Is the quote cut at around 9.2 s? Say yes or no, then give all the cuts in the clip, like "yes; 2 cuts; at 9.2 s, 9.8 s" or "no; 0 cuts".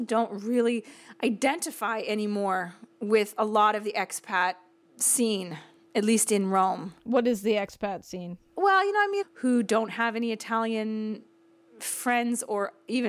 yes; 1 cut; at 9.2 s